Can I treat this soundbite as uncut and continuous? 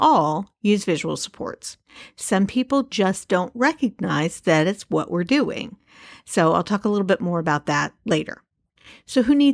yes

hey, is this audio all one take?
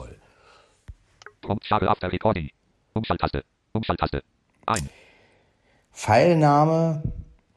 no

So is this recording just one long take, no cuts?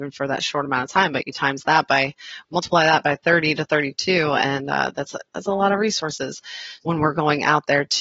no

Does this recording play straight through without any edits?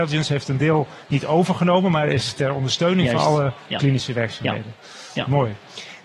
yes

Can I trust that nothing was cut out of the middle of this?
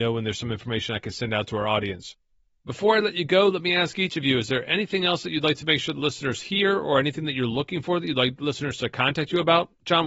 yes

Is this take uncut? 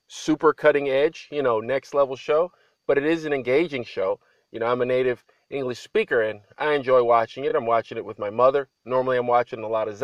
yes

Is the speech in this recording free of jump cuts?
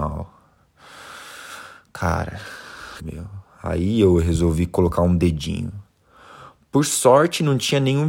no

